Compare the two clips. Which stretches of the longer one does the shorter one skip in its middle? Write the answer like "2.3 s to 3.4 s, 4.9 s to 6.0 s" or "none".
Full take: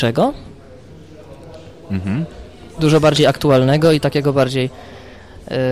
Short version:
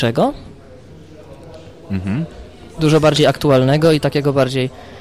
none